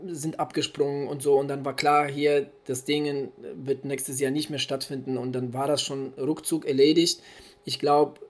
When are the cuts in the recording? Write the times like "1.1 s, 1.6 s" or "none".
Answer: none